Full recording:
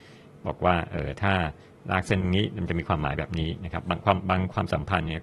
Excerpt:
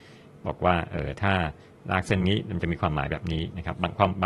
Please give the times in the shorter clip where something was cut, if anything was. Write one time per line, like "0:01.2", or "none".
0:02.2